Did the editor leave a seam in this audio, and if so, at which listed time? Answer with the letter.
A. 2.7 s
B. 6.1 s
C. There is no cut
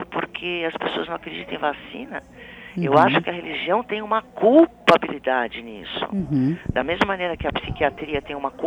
C